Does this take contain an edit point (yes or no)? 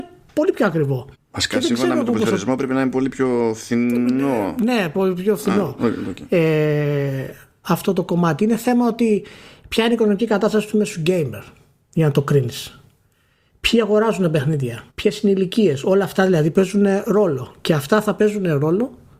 yes